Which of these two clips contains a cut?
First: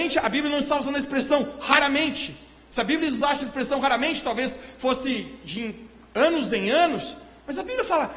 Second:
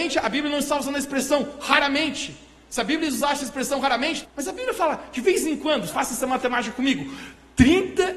second; 2 cuts; at 4.2 s, 5.9 s

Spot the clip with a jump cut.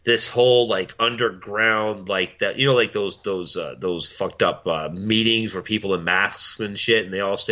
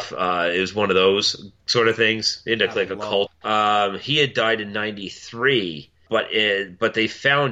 second; 2 cuts; at 3.3 s, 6.1 s

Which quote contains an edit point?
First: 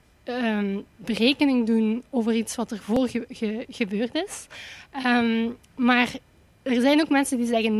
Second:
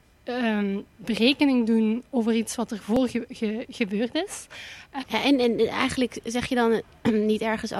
second; 1 cut; at 5.0 s

